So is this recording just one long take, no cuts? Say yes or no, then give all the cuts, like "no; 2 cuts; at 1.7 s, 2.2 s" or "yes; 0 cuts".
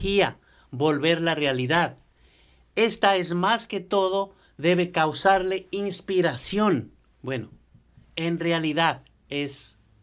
no; 1 cut; at 7.1 s